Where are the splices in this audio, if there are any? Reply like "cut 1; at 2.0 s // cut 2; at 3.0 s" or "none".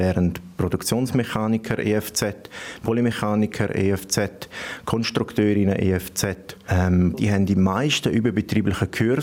cut 1; at 7.1 s